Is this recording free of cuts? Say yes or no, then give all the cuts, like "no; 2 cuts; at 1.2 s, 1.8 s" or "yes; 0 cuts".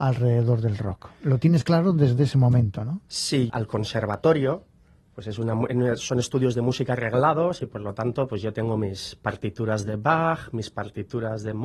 no; 1 cut; at 3.5 s